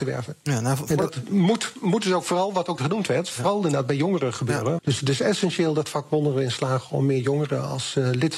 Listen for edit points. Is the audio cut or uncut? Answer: cut